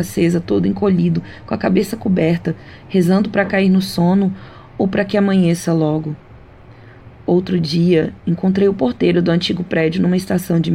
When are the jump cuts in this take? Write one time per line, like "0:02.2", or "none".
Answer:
none